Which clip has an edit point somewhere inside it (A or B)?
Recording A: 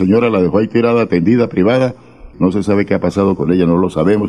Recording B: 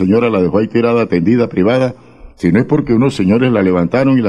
A